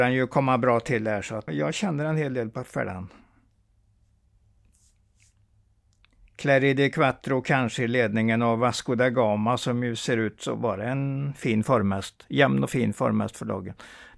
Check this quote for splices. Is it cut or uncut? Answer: cut